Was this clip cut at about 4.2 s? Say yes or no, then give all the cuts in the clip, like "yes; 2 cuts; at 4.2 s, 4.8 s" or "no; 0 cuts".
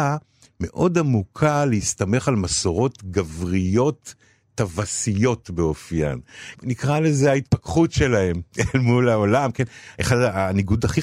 no; 1 cut; at 6.6 s